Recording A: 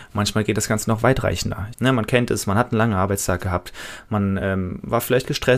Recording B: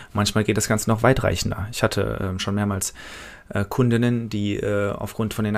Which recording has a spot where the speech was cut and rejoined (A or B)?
A